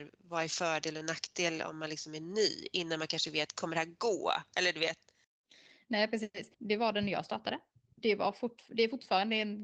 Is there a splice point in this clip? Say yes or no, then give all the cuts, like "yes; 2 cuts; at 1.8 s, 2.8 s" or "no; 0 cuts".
yes; 1 cut; at 6.5 s